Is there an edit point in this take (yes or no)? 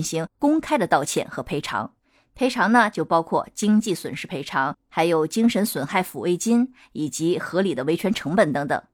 no